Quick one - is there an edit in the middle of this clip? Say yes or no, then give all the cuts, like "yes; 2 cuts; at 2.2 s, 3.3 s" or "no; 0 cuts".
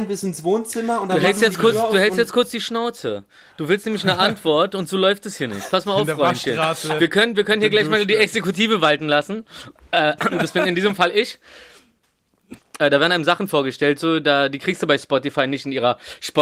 yes; 1 cut; at 12.6 s